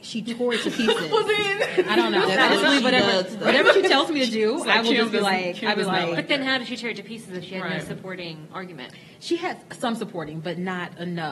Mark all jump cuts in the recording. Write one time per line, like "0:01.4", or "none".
none